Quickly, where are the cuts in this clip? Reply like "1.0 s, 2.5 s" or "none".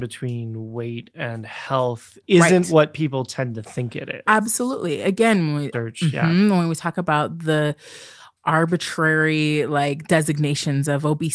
5.7 s

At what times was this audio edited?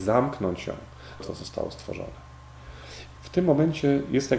1.2 s, 3.2 s

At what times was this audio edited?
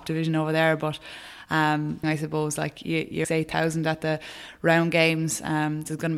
2.0 s, 3.2 s

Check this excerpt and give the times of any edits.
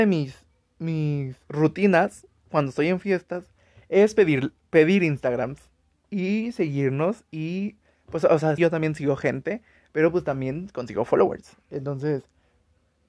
8.6 s

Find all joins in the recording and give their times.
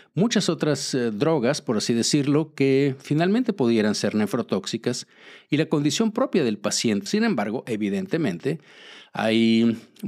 7.1 s

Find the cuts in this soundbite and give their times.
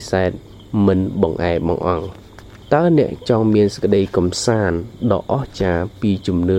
2.6 s

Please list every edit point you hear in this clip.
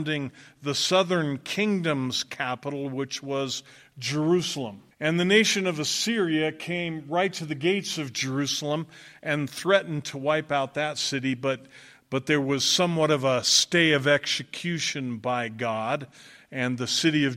4.9 s

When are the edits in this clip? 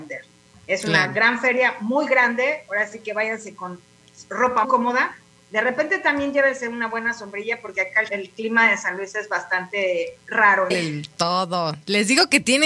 4.6 s, 8.1 s, 10.7 s

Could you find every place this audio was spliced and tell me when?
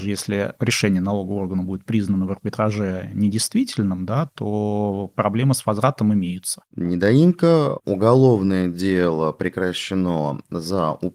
6.7 s, 7.8 s

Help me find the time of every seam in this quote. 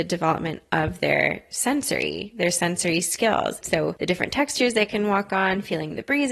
3.6 s

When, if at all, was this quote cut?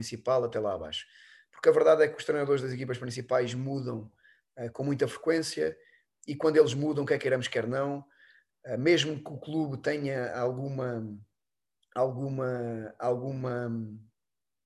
none

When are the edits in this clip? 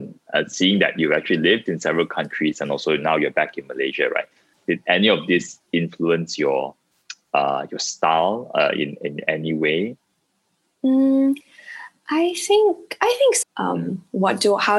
13.4 s

